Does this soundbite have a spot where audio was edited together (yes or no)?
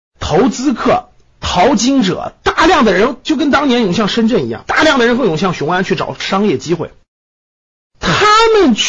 no